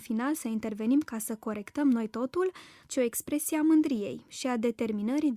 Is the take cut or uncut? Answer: cut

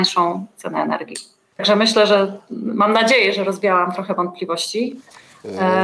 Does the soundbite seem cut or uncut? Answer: uncut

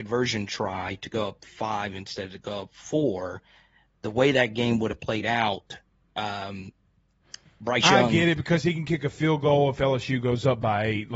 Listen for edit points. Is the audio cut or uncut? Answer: uncut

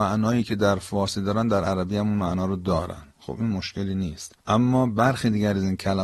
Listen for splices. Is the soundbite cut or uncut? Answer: cut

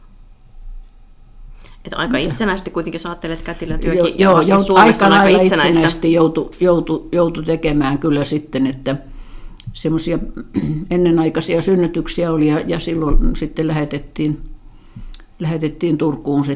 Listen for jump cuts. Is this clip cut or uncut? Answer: uncut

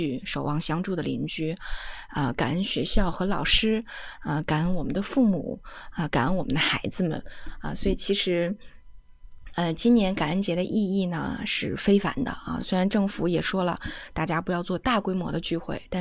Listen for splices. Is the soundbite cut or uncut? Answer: uncut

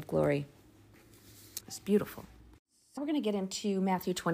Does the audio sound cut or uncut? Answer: cut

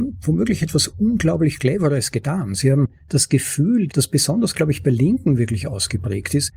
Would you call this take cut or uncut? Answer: cut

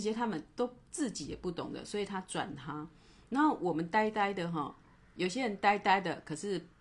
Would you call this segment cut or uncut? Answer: uncut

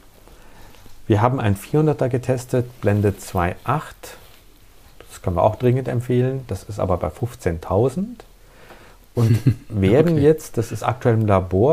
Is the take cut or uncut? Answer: uncut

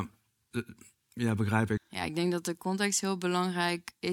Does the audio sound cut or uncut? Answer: cut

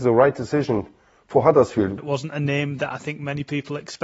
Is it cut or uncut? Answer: cut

